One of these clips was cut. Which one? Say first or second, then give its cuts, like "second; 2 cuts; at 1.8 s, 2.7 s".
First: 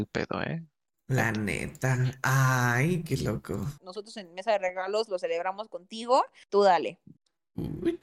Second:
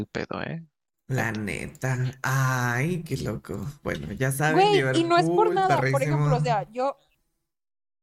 first; 2 cuts; at 3.8 s, 6.5 s